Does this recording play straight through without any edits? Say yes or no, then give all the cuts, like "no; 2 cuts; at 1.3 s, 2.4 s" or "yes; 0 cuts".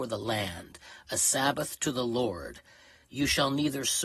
yes; 0 cuts